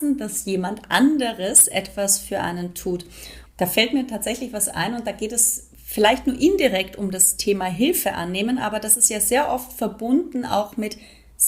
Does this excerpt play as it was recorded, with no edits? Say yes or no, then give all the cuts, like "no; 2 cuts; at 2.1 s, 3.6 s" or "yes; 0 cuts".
no; 1 cut; at 3.5 s